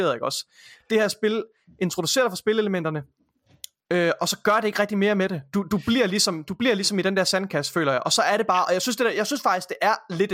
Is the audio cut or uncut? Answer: uncut